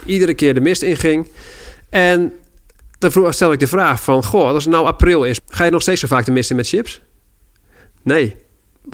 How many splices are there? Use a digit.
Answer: 1